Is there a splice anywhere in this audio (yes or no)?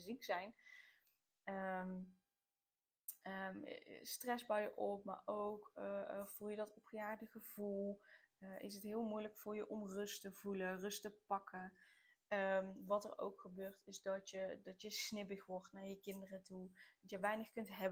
no